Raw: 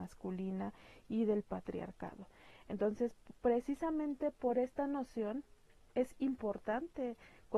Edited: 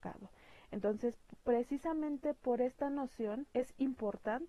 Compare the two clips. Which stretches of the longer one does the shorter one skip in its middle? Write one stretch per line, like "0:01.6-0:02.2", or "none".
0:05.5-0:05.9